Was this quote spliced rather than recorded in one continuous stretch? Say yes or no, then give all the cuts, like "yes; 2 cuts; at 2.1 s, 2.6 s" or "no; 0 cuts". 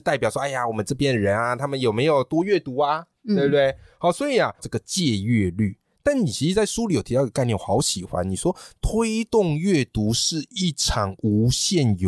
yes; 1 cut; at 4.6 s